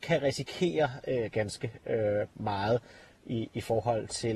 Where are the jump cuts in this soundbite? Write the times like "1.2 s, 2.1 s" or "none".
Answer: 1.3 s